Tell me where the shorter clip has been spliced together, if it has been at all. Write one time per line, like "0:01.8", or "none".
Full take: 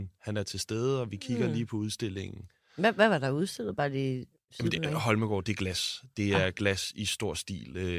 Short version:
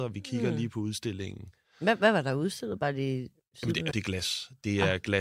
0:03.9